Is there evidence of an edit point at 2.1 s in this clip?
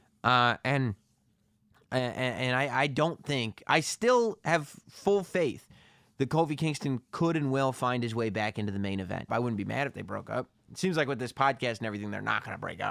no; 1 cut; at 9.3 s

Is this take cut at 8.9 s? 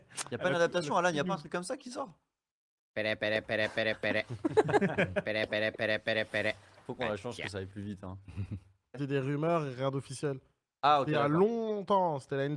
yes; 1 cut; at 8.9 s

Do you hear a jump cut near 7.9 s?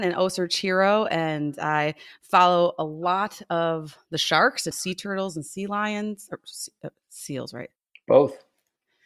no; 1 cut; at 4.7 s

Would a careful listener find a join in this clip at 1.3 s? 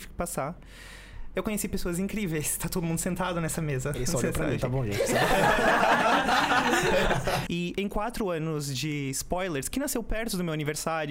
yes; 2 cuts; at 1.3 s, 7.5 s

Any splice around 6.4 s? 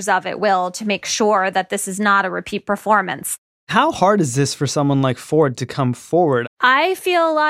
yes; 1 cut; at 6.4 s

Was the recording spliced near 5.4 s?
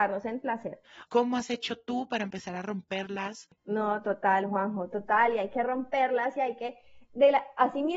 no; 2 cuts; at 1.1 s, 3.6 s

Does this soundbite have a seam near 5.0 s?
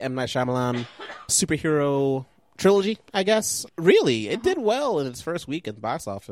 no; 2 cuts; at 1.3 s, 3.7 s

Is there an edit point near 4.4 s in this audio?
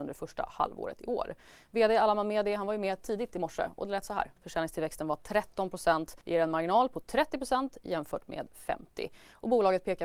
yes; 2 cuts; at 4.4 s, 6.2 s

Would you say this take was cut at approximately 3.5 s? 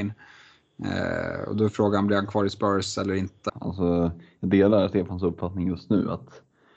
yes; 1 cut; at 3.5 s

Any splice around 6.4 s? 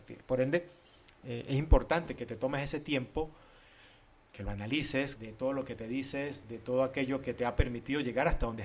yes; 2 cuts; at 5.2 s, 6.4 s

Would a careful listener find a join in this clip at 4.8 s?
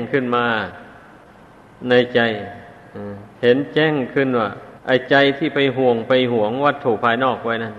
yes; 2 cuts; at 3.3 s, 4.8 s

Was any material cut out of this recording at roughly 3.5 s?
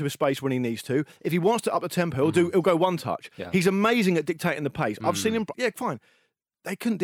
no; 1 cut; at 5.5 s

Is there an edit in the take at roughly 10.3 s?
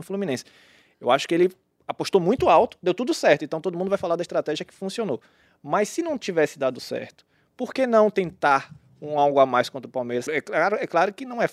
yes; 1 cut; at 10.3 s

